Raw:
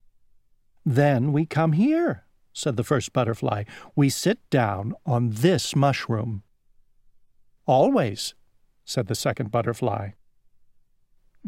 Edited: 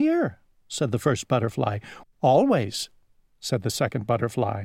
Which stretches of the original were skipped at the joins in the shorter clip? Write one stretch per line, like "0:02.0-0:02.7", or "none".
0:03.9-0:07.5